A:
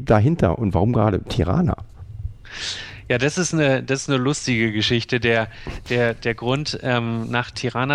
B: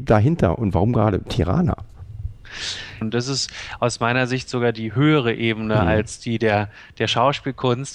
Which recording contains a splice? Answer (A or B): B